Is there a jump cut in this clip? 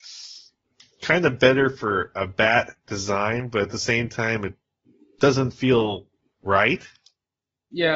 no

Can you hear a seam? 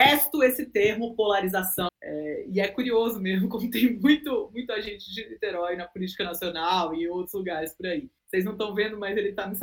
yes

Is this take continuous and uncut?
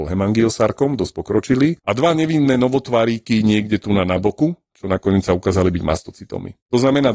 yes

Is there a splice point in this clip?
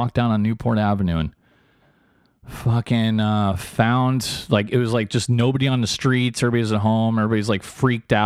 no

